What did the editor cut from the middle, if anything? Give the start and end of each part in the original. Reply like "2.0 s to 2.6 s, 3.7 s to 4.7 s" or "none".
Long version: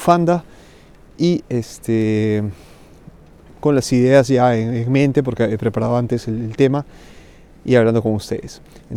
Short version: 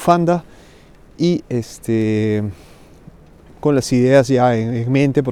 none

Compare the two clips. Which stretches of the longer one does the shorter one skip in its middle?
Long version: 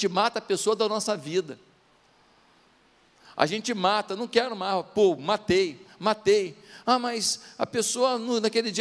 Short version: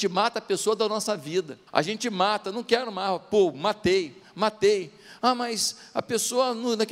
1.7 s to 3.3 s

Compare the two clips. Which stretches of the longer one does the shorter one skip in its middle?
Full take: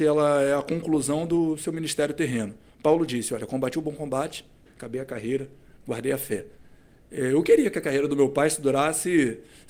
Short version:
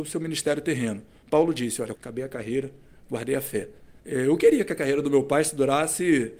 3.5 s to 4.7 s, 6.8 s to 7.1 s

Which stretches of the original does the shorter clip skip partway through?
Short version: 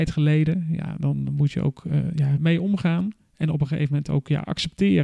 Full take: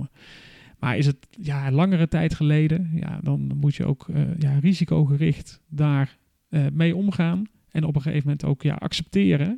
4.6 s to 6.7 s

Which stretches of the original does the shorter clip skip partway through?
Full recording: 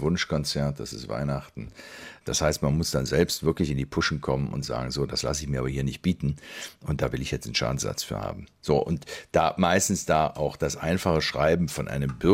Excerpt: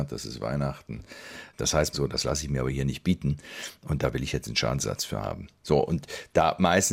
2.6 s to 4.9 s

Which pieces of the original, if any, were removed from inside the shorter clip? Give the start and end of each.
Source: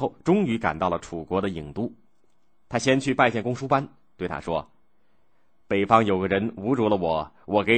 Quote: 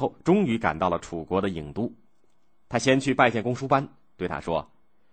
none

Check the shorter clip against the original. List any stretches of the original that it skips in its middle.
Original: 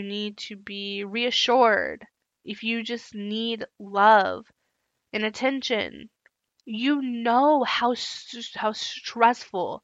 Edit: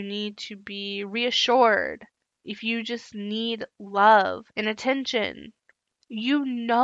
4.5 s to 5.1 s

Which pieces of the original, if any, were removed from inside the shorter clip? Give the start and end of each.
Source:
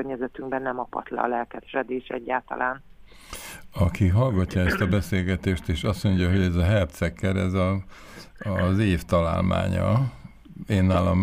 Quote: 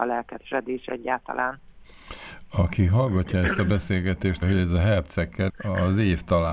5.6 s to 6.3 s, 7.3 s to 8.3 s

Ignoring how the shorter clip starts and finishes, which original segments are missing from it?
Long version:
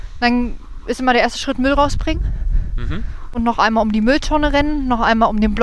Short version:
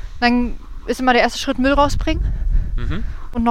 none

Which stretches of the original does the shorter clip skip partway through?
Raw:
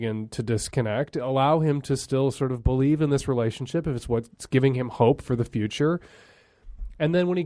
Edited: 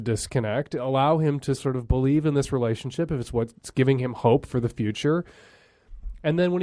2.0 s to 2.3 s

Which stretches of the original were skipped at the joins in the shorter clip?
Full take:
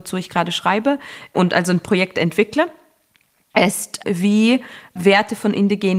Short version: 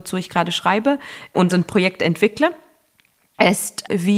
1.5 s to 1.6 s

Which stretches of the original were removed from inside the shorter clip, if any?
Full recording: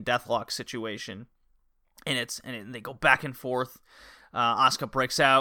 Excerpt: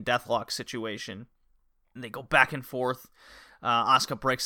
2.0 s to 2.7 s

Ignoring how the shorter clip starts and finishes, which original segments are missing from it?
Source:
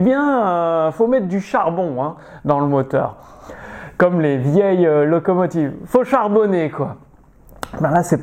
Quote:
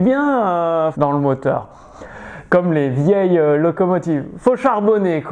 0.9 s to 2.4 s

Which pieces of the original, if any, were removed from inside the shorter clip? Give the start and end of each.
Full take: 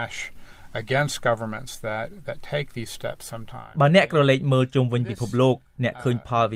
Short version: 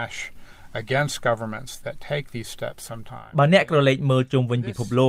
1.8 s to 2.2 s

